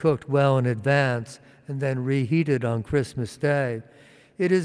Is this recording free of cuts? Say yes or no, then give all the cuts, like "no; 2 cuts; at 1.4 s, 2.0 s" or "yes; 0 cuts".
yes; 0 cuts